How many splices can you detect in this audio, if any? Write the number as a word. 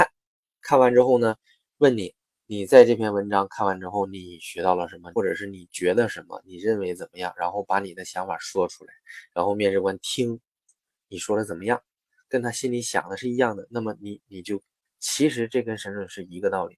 two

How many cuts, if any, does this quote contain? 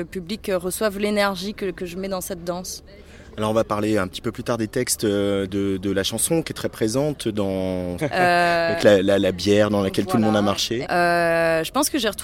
three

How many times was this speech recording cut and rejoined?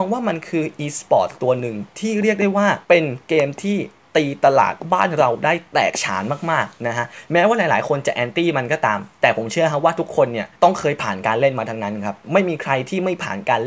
two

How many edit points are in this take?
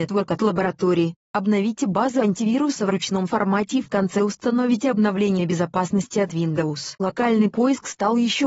one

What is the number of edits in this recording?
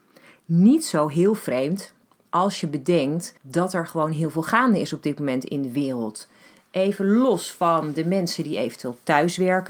one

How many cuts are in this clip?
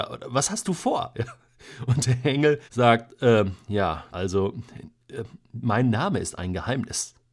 two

